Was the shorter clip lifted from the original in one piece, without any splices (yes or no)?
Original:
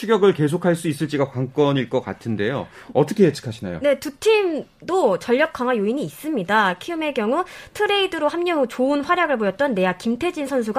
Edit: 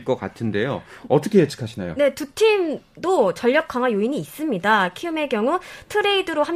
yes